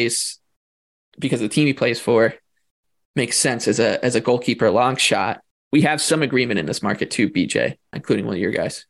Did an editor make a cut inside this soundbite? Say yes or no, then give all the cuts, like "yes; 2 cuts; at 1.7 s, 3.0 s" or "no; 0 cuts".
yes; 1 cut; at 5.5 s